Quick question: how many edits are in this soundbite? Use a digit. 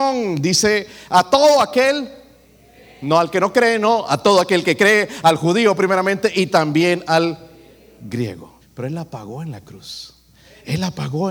1